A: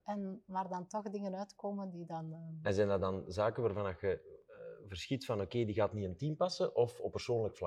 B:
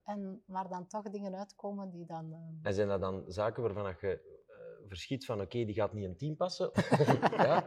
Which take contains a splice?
B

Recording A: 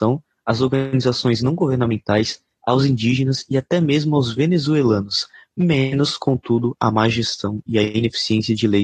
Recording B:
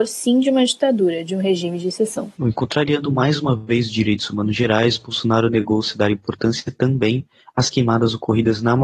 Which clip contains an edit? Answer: B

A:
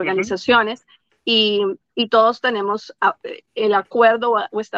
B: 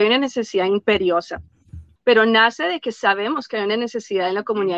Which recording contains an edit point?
B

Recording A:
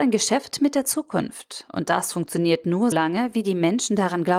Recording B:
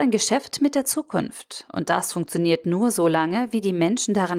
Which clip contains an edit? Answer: A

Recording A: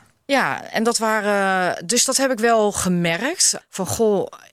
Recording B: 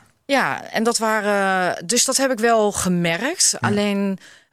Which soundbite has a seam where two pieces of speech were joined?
A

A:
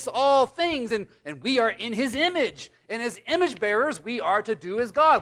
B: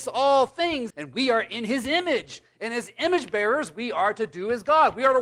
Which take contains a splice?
B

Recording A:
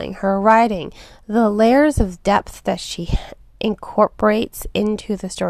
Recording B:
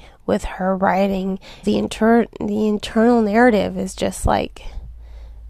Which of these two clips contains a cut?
B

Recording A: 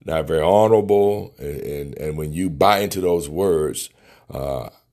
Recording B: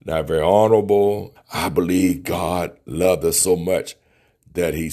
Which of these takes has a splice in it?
B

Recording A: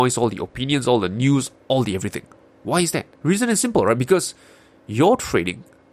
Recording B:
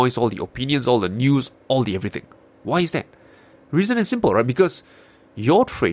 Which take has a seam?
A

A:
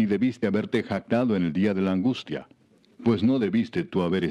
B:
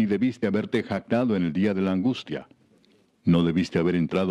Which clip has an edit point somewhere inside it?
A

